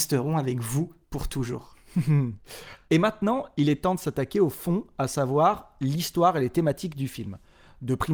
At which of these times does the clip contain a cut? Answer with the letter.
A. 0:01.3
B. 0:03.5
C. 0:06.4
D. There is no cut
D